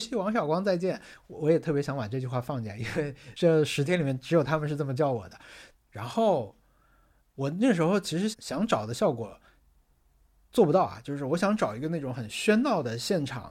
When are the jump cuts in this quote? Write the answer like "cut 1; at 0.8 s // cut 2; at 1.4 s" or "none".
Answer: cut 1; at 5.7 s // cut 2; at 8.3 s